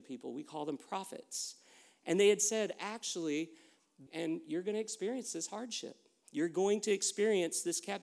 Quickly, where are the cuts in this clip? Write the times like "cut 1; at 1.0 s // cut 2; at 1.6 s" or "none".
cut 1; at 4.1 s